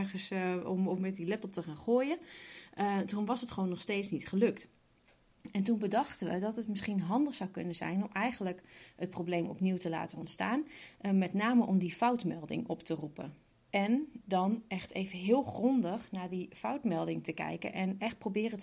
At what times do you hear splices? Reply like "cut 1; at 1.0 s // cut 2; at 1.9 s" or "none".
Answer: none

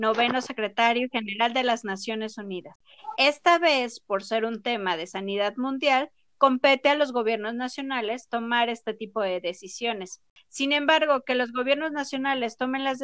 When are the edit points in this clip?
cut 1; at 3.1 s

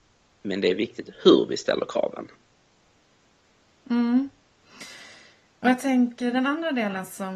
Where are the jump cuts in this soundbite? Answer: none

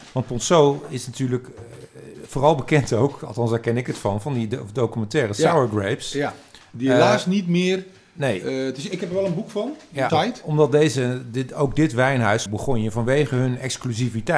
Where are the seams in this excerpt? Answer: cut 1; at 10.1 s // cut 2; at 12.5 s

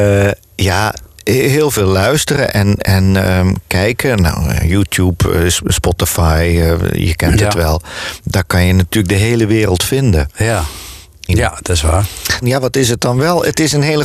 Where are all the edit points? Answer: cut 1; at 11.3 s // cut 2; at 12.4 s

